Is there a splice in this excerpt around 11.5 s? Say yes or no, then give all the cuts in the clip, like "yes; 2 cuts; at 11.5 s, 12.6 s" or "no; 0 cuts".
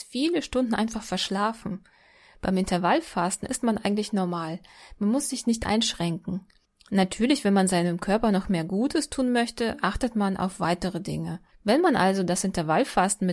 yes; 1 cut; at 11.5 s